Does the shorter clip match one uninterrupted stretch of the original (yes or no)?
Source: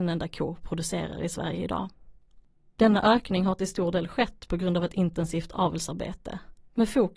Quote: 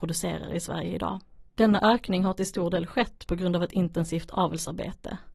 no